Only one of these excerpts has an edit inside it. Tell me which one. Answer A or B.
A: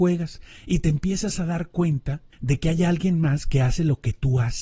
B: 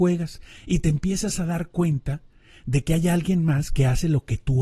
A